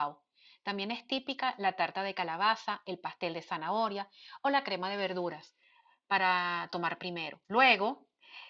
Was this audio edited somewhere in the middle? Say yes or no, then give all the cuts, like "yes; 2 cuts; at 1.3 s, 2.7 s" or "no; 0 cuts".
yes; 1 cut; at 7.4 s